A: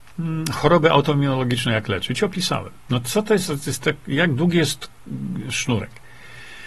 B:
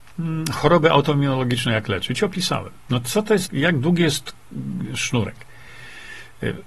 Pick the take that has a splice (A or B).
B